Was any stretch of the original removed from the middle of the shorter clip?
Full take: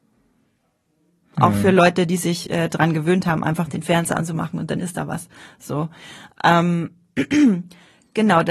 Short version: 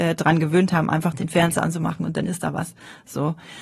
no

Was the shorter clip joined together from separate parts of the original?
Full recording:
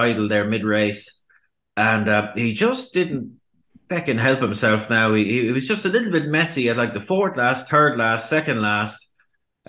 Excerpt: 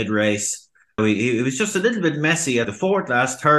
yes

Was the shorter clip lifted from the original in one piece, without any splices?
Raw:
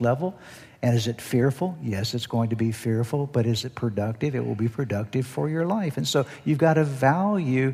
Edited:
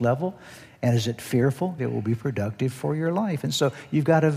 no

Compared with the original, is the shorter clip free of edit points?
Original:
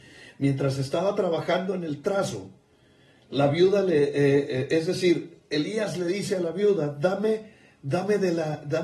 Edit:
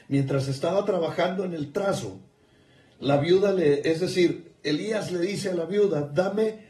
no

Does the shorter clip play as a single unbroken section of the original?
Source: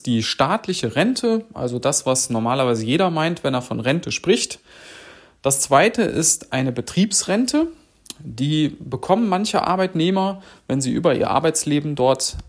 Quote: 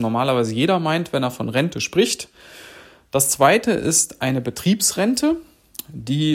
yes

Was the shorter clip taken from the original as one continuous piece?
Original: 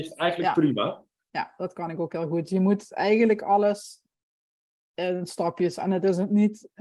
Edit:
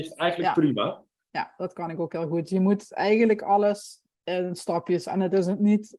no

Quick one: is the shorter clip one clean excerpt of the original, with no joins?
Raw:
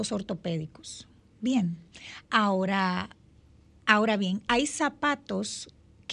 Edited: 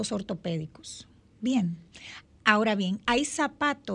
no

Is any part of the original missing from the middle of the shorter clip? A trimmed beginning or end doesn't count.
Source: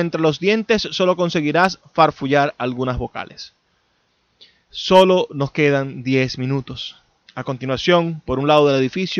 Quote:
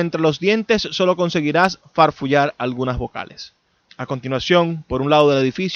yes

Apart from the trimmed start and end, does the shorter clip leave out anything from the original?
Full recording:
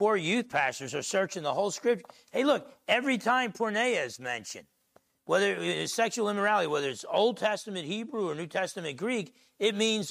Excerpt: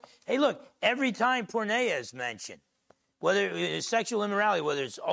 no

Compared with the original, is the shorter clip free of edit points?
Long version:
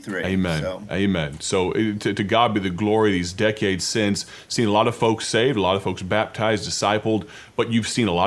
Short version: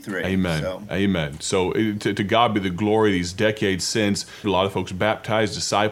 no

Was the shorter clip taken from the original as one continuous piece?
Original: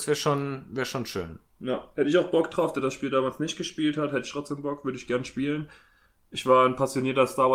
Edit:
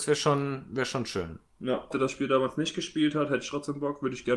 no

